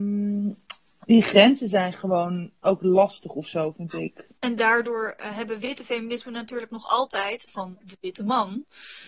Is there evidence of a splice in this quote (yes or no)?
yes